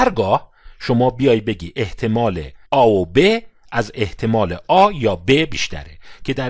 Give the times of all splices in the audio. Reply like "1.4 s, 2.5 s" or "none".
2.6 s